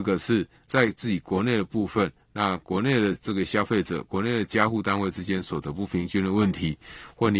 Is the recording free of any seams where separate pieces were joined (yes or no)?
yes